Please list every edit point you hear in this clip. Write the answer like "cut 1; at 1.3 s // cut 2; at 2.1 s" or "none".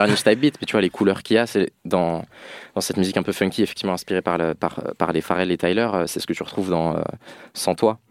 none

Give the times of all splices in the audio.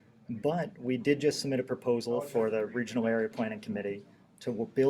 none

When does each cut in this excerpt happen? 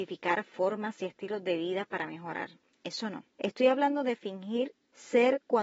none

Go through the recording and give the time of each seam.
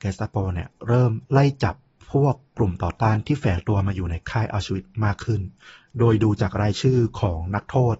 none

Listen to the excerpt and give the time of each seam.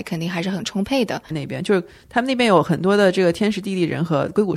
cut 1; at 1.3 s

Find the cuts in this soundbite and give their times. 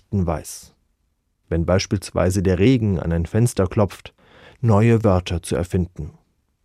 cut 1; at 4.5 s

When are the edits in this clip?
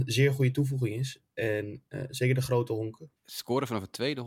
cut 1; at 3.2 s

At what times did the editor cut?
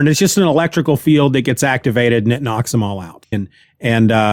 cut 1; at 3.3 s

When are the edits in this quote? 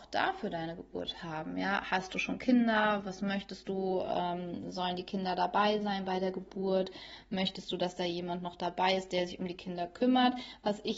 none

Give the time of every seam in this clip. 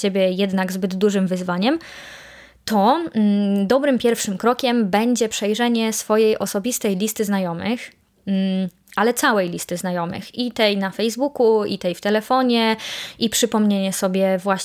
none

